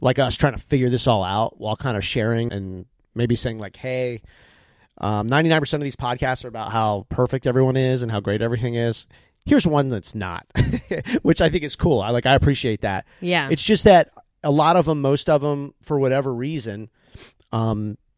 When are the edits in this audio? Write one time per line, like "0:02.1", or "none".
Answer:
0:02.5